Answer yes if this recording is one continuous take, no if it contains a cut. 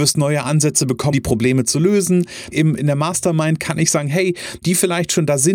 no